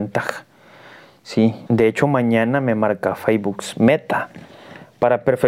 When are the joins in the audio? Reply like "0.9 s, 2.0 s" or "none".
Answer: 1.7 s